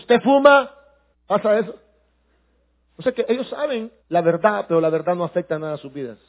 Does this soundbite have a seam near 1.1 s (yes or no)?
yes